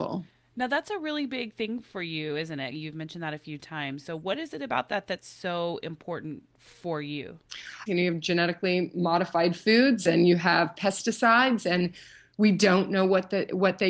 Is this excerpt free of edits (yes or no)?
no